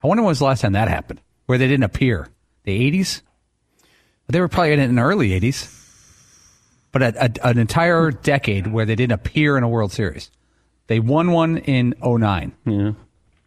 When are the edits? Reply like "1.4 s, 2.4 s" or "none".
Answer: none